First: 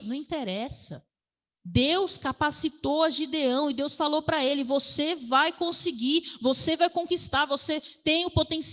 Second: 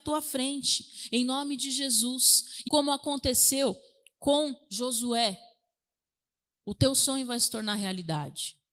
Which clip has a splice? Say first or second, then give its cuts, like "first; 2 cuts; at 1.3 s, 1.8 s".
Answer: second; 1 cut; at 2.7 s